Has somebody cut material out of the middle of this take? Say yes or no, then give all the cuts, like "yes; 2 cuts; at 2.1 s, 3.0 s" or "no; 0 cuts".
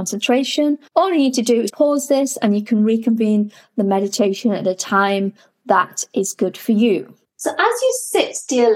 yes; 2 cuts; at 1.7 s, 7.2 s